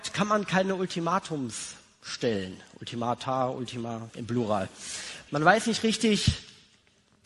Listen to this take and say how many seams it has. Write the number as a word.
two